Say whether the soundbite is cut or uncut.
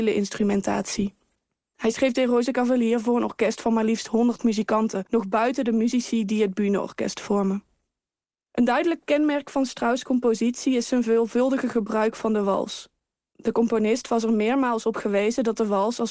uncut